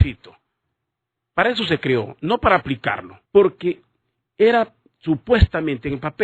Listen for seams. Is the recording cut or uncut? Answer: cut